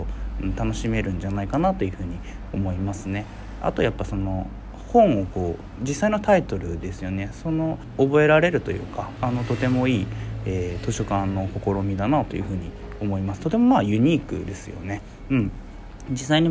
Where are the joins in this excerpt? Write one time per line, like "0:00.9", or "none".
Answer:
0:09.2